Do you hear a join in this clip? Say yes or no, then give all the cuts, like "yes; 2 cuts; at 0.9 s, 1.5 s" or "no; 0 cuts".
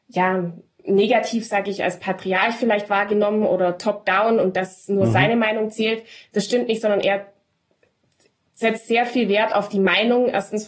no; 0 cuts